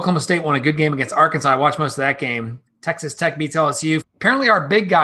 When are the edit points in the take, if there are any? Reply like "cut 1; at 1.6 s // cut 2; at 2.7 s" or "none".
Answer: cut 1; at 2.7 s // cut 2; at 4.0 s